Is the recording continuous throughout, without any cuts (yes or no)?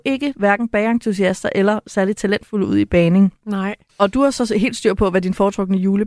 yes